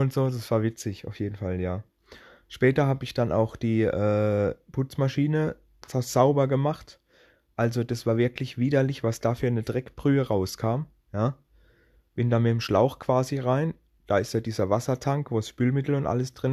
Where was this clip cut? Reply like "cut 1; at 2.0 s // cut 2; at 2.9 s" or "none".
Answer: none